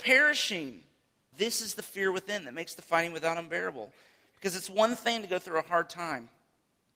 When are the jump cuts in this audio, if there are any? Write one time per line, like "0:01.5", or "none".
0:01.3